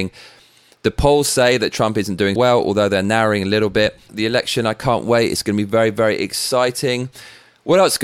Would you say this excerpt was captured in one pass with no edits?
no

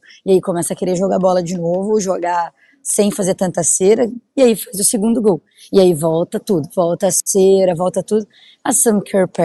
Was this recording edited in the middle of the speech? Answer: no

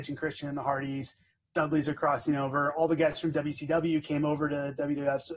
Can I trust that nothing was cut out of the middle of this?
yes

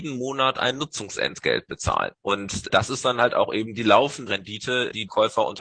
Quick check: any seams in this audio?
yes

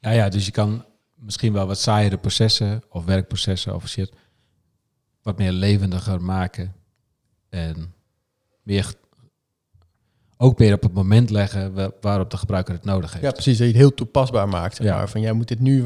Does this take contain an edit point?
no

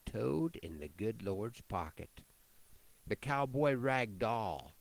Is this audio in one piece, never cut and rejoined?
no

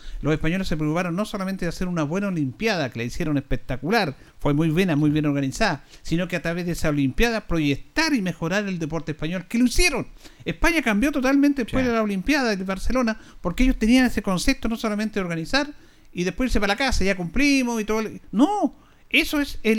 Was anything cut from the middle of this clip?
no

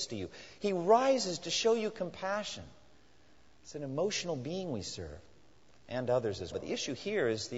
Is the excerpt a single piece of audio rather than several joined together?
no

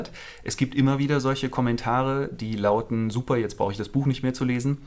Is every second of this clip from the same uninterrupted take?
yes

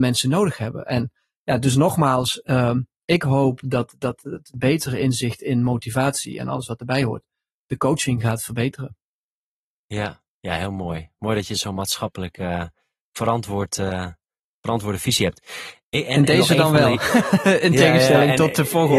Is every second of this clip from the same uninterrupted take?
yes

